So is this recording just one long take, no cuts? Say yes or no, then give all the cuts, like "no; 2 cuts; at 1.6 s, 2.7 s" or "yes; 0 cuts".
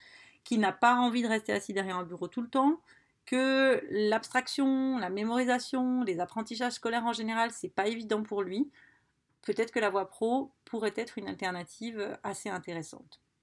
yes; 0 cuts